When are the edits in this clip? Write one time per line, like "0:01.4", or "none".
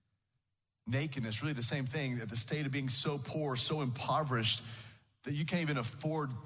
none